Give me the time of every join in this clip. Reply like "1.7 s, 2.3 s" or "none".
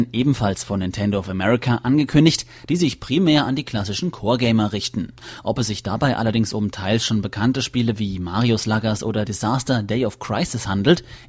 2.6 s